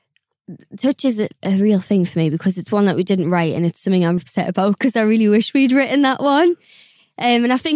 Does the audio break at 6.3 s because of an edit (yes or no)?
no